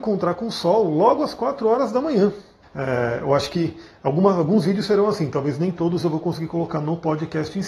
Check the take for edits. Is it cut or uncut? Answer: cut